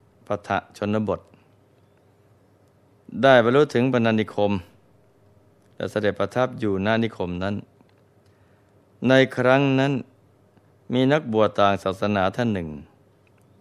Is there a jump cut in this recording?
no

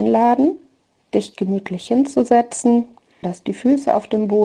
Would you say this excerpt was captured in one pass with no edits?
no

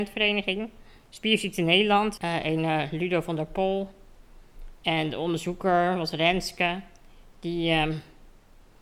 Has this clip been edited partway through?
yes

